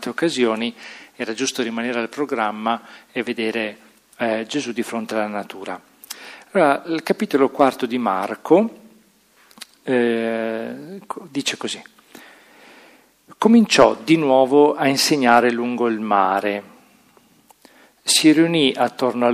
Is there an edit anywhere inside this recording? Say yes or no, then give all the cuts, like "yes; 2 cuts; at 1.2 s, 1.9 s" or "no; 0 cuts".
no; 0 cuts